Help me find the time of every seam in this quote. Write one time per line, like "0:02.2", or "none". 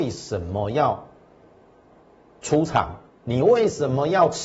none